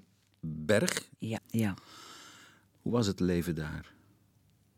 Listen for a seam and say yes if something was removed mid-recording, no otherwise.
yes